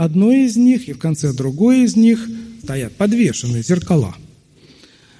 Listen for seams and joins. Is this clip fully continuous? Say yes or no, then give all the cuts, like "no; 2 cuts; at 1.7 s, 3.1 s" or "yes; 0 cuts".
no; 1 cut; at 2.6 s